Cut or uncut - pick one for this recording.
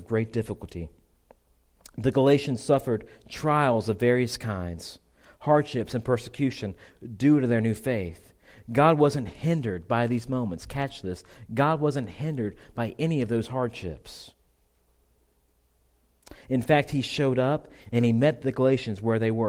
uncut